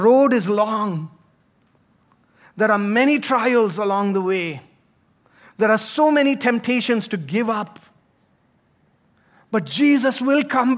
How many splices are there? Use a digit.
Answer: 0